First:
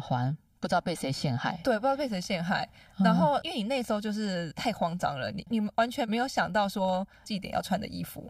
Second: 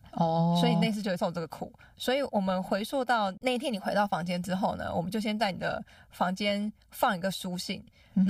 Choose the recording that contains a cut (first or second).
first